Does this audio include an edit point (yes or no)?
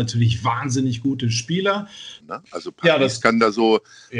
yes